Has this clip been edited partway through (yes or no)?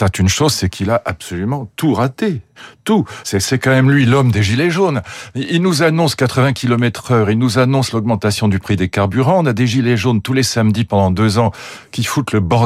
no